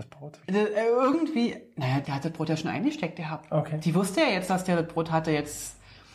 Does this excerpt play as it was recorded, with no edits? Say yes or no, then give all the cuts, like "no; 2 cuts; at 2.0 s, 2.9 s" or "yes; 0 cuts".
no; 1 cut; at 2.0 s